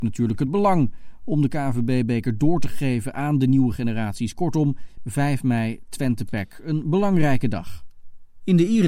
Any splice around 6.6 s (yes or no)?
no